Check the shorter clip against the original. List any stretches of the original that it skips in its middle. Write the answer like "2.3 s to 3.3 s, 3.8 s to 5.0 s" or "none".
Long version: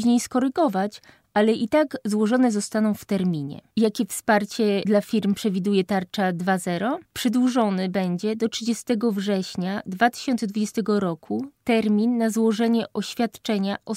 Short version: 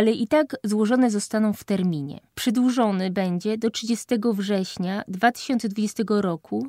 3.7 s to 7.1 s